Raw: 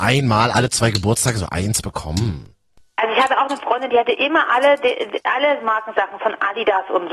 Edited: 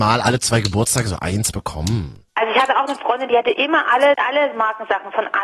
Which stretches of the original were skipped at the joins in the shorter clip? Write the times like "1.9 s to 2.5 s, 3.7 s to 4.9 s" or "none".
2.6 s to 2.9 s, 4.8 s to 5.2 s